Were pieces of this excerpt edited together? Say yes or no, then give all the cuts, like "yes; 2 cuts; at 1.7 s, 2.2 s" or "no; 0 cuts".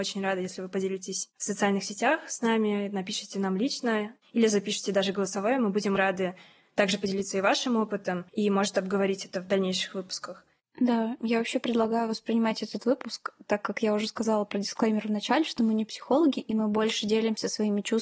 yes; 2 cuts; at 6.0 s, 8.3 s